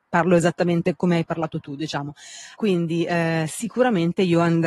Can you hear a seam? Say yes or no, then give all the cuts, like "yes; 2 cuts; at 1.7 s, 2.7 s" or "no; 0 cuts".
yes; 1 cut; at 2.6 s